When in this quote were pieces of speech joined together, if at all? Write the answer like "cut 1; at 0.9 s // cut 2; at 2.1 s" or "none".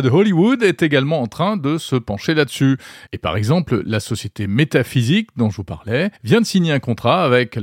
cut 1; at 6.2 s